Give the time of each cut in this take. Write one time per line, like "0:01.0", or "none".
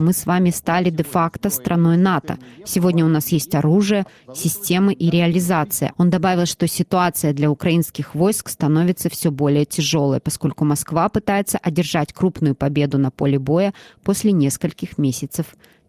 0:05.9